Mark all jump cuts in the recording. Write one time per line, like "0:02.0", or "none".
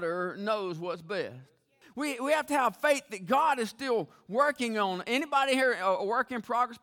0:01.8